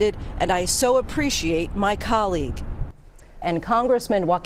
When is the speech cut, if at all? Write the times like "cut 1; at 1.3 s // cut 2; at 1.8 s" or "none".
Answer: cut 1; at 3.4 s